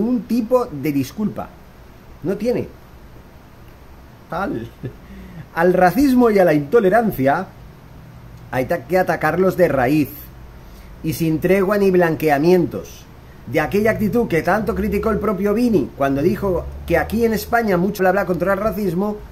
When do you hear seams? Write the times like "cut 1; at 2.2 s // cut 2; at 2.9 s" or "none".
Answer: cut 1; at 4.3 s // cut 2; at 13.4 s // cut 3; at 18.0 s